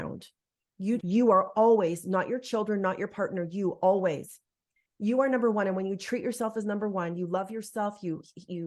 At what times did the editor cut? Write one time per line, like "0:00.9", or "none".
0:01.0